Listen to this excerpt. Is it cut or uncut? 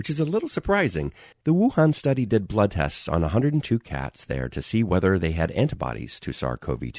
cut